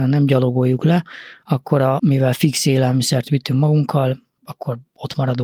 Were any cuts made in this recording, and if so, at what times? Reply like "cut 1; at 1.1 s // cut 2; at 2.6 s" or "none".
cut 1; at 2.0 s // cut 2; at 4.4 s